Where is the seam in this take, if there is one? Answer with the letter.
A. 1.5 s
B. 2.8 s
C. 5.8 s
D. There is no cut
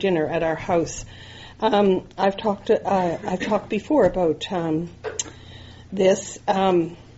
D